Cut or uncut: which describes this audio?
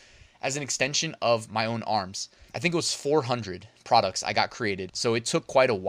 cut